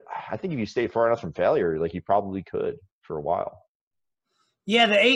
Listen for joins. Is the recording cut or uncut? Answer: uncut